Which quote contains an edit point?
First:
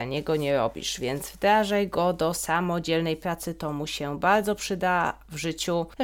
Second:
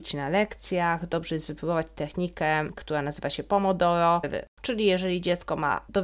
second; 1 cut; at 4.2 s

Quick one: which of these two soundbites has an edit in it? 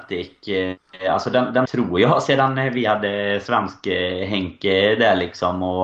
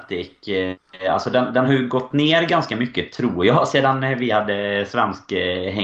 first; 1 cut; at 1.6 s

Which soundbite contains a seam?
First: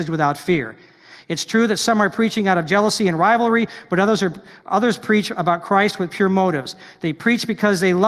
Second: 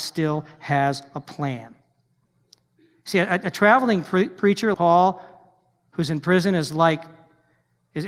second; 1 cut; at 4.7 s

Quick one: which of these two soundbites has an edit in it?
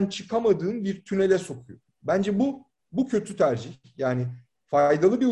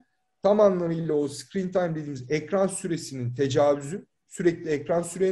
first; 1 cut; at 1.9 s

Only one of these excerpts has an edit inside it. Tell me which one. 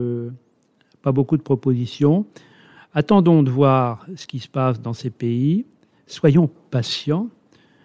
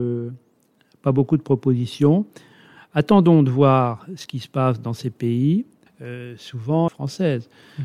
second; 2 cuts; at 5.9 s, 6.9 s

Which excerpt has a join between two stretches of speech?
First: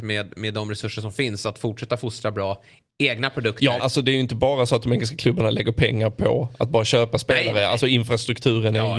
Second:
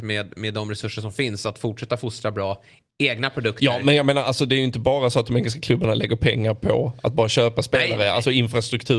first; 1 cut; at 3.8 s

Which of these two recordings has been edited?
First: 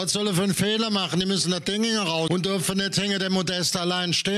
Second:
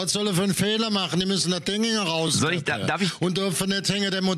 first; 1 cut; at 2.3 s

